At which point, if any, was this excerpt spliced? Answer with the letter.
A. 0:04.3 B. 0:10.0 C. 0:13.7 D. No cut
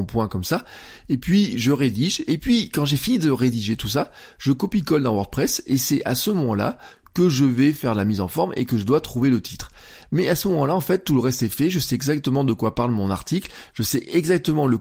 D